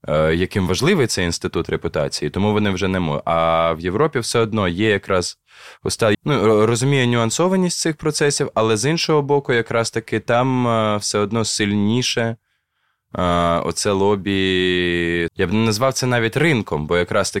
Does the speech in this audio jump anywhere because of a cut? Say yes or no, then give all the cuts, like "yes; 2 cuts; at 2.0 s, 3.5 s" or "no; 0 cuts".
yes; 2 cuts; at 6.1 s, 15.3 s